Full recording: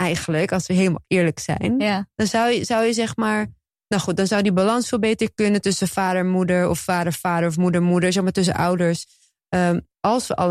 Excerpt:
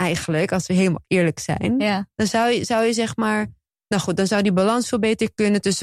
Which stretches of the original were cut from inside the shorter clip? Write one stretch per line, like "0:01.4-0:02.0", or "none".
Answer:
none